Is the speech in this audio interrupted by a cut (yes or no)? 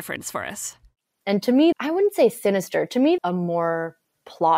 yes